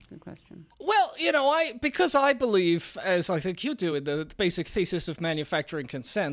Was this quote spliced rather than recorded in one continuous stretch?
no; 0 cuts

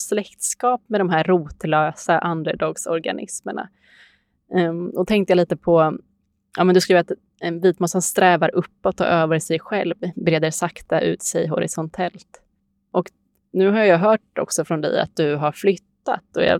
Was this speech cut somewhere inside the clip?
yes; 1 cut; at 10.1 s

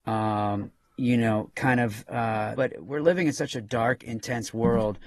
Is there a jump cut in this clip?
yes; 1 cut; at 2.5 s

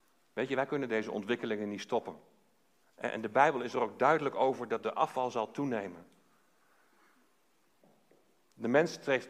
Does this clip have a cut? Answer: yes; 1 cut; at 2.8 s

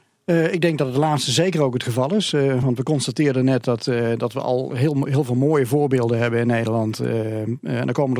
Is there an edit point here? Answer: no; 0 cuts

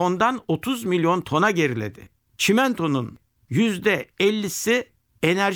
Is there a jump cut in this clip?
yes; 1 cut; at 2.3 s

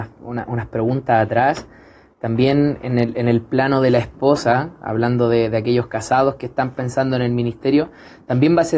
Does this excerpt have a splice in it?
no; 0 cuts

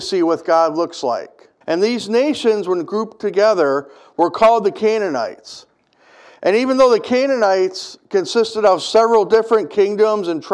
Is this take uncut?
no; 1 cut; at 1.6 s

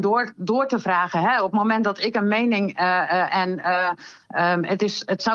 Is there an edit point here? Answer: yes; 1 cut; at 3.3 s

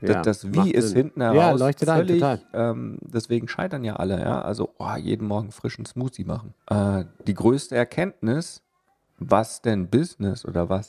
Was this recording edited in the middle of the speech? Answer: yes; 1 cut; at 6.6 s

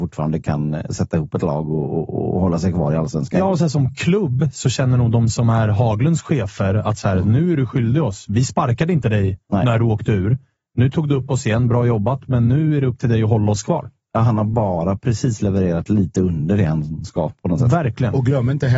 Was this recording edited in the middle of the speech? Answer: no; 0 cuts

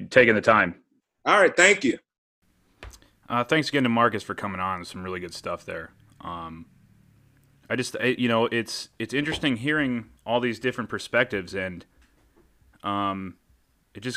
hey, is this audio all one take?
yes; 0 cuts

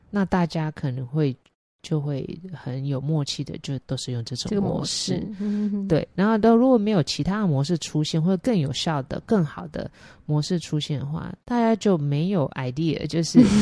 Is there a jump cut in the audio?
no; 0 cuts

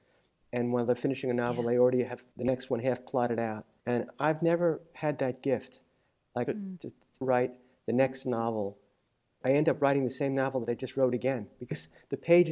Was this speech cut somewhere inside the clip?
yes; 2 cuts; at 6.5 s, 9.3 s

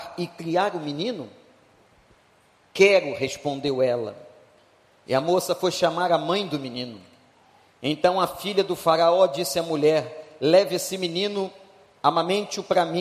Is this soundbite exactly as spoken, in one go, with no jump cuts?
yes; 0 cuts

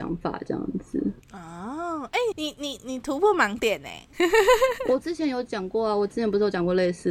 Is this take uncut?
no; 1 cut; at 2.8 s

